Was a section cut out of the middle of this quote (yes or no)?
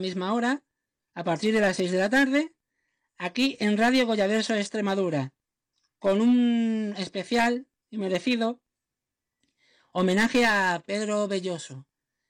no